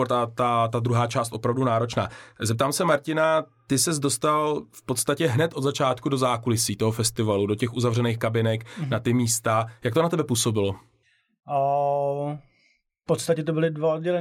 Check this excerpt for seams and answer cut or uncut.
uncut